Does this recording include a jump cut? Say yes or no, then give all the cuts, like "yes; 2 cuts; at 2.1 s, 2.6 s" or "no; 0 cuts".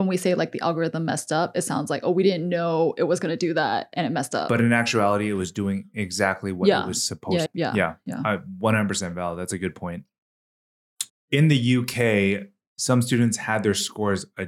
yes; 2 cuts; at 7.5 s, 11.1 s